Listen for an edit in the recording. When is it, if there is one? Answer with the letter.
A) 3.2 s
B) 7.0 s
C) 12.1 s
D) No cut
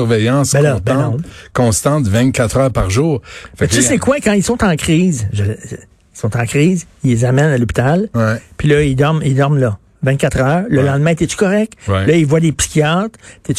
D